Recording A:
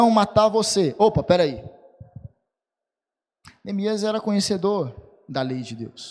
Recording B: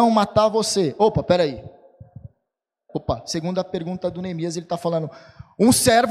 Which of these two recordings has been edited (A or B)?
B